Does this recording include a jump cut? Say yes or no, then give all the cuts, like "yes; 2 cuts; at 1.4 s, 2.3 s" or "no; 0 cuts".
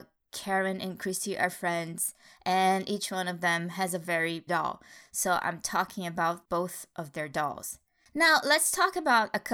yes; 2 cuts; at 4.5 s, 8.0 s